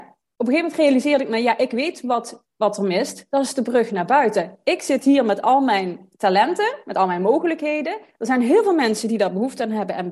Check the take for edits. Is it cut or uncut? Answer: uncut